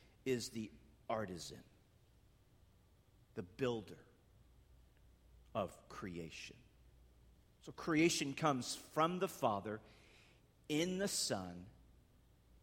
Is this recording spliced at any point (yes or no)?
no